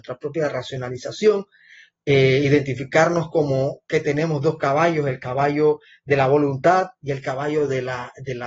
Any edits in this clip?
no; 0 cuts

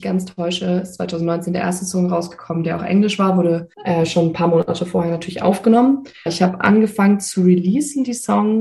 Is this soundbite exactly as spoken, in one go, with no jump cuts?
no; 2 cuts; at 3.7 s, 6.3 s

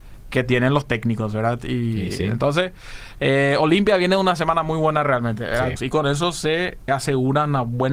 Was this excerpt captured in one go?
no; 2 cuts; at 5.8 s, 6.9 s

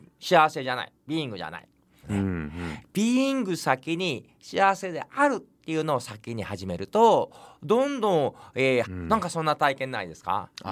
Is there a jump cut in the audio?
yes; 2 cuts; at 2.0 s, 8.8 s

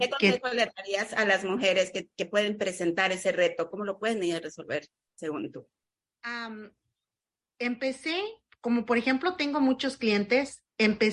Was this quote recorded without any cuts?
no; 1 cut; at 3.7 s

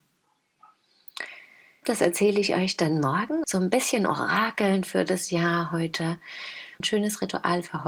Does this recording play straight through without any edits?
no; 3 cuts; at 1.8 s, 3.4 s, 6.8 s

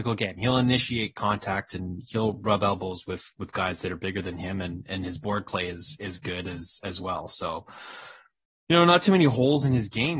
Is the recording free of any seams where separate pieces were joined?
yes; 0 cuts

